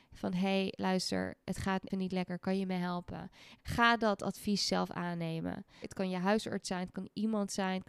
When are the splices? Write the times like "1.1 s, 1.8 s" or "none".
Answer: 1.9 s, 3.6 s, 5.8 s